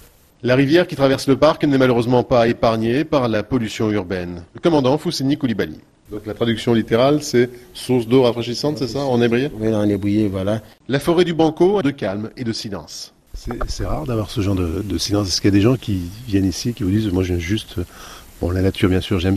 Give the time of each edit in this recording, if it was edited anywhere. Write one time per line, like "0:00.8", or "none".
0:06.1
0:11.8